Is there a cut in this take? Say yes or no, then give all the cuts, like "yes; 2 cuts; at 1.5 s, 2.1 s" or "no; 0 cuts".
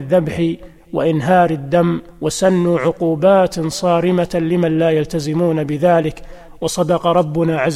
yes; 1 cut; at 2.1 s